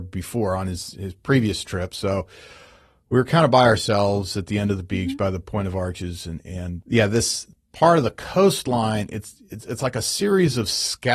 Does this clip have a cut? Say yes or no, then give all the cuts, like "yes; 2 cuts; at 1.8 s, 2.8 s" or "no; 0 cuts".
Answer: no; 0 cuts